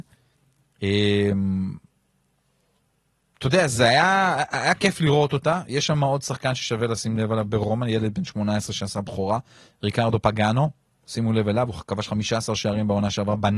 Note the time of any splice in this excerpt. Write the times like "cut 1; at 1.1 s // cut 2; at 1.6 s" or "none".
none